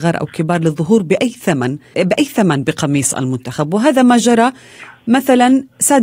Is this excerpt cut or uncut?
cut